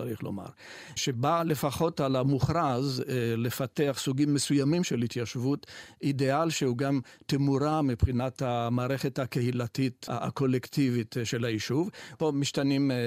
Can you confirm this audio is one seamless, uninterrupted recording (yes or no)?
no